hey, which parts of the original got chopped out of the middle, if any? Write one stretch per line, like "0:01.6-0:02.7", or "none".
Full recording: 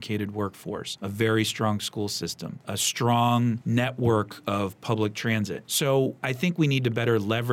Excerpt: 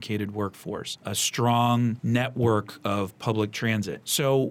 0:01.0-0:02.6